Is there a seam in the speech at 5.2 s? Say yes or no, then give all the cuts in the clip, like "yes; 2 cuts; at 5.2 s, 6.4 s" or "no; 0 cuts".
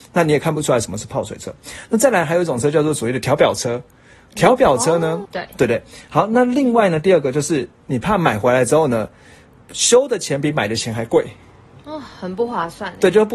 yes; 1 cut; at 5.2 s